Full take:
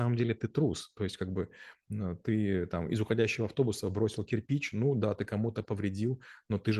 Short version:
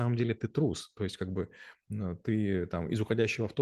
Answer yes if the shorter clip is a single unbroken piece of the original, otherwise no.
yes